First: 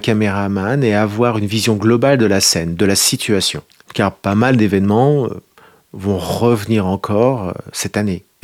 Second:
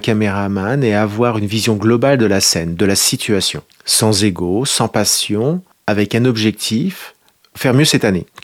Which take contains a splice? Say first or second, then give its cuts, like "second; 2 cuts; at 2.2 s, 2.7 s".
first; 1 cut; at 3.8 s